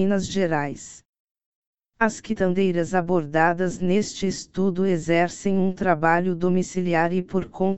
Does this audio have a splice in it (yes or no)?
no